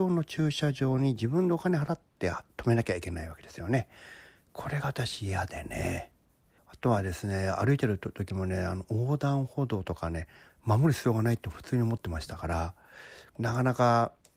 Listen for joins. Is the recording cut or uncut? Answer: cut